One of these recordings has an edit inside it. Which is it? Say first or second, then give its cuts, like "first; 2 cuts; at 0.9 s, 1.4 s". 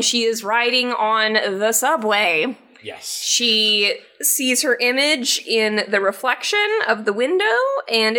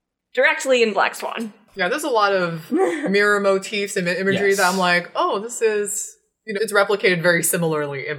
second; 1 cut; at 6.6 s